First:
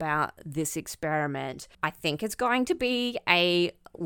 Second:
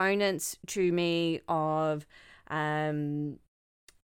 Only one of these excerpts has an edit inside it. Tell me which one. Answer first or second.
first